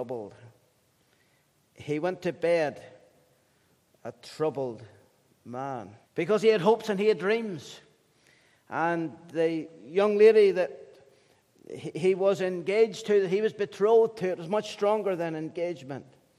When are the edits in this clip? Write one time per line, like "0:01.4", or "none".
0:06.0